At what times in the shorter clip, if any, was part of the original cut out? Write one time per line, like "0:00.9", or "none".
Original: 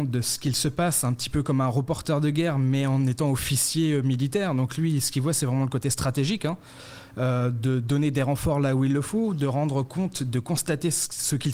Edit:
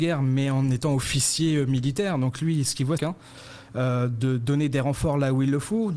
0:03.0